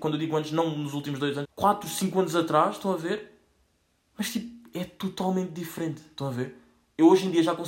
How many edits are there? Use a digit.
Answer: 1